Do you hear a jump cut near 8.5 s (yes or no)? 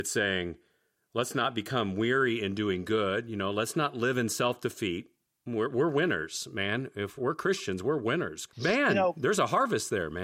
yes